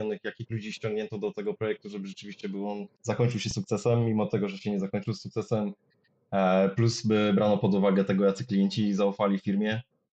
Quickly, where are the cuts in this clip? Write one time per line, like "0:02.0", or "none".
none